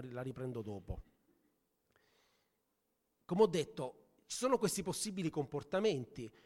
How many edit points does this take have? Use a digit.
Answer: 0